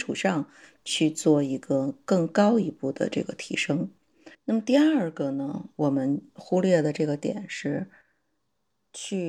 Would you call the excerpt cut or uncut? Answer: cut